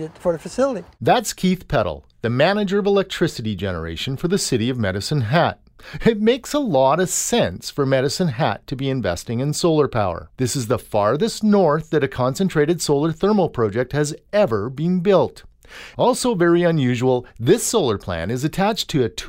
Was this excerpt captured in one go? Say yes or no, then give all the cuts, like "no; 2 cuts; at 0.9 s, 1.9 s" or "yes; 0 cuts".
no; 1 cut; at 10.3 s